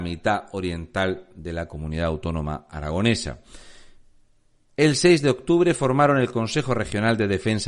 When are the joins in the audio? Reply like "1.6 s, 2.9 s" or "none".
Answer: none